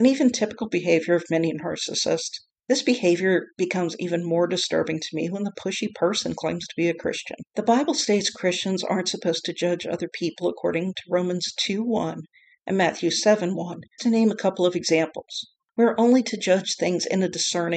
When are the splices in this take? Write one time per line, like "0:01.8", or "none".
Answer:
0:07.5
0:14.0